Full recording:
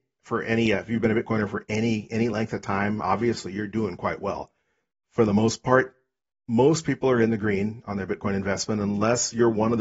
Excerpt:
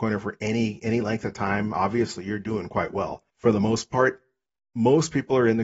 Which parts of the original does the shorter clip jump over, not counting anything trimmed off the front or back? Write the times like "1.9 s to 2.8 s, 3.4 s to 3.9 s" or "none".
4.6 s to 5.0 s